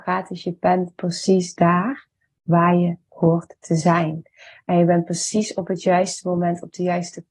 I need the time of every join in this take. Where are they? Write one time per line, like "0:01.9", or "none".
none